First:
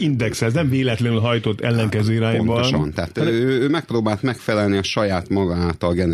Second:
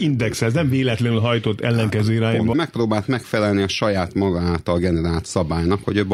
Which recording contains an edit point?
second; 1 cut; at 2.5 s

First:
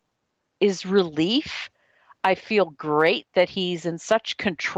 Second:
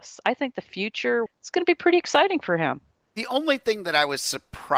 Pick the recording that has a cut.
second; 1 cut; at 1.3 s

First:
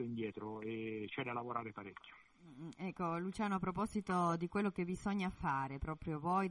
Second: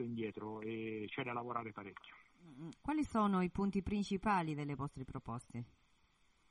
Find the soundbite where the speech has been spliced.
second; 1 cut; at 2.7 s

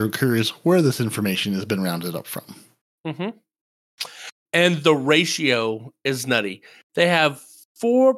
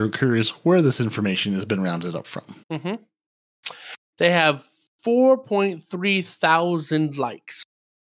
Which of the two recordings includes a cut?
second; 2 cuts; at 2.6 s, 4.1 s

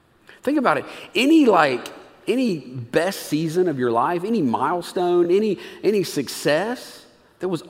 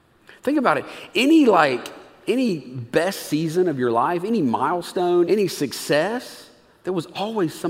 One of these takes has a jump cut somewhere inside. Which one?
second; 1 cut; at 5.2 s

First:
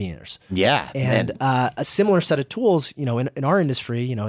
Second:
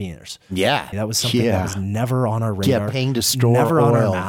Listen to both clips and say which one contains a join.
second; 1 cut; at 0.9 s

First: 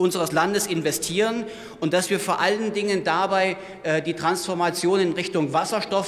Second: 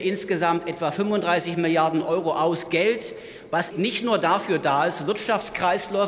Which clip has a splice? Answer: second; 1 cut; at 3.7 s

